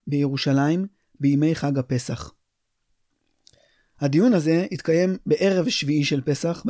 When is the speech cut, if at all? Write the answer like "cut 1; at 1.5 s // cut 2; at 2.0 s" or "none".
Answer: none